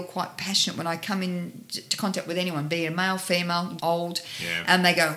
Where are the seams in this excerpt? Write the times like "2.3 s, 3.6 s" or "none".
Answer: 3.8 s